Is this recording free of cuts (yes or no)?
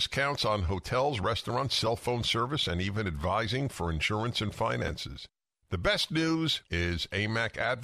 yes